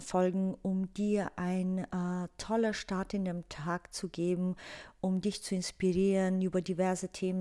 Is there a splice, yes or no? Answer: no